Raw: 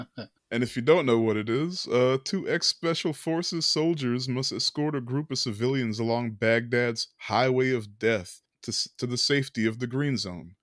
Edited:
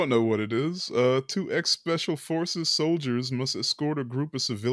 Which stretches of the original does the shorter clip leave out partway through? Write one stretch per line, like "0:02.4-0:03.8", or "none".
none